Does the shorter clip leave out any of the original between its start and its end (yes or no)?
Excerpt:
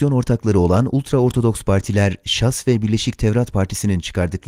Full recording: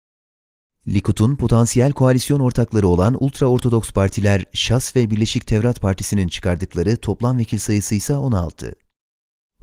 no